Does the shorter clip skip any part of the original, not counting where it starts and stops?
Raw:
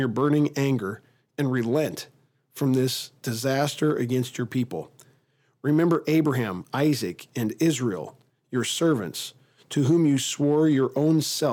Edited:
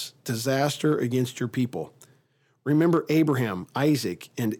no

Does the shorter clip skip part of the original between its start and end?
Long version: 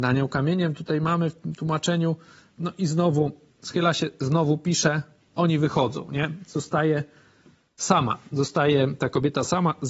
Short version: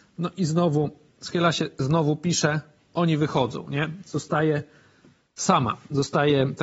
no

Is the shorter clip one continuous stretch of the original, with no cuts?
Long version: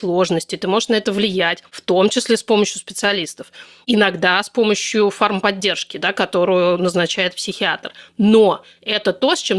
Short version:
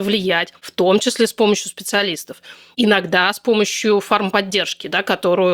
yes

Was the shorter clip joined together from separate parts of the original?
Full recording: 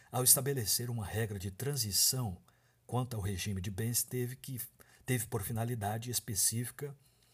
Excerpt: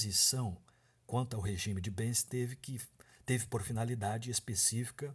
no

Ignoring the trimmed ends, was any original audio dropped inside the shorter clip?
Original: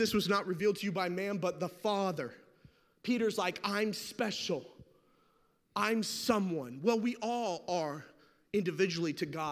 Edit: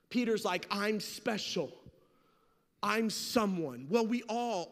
no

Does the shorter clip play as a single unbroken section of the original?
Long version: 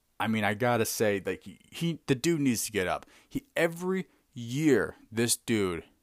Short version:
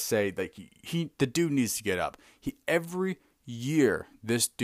yes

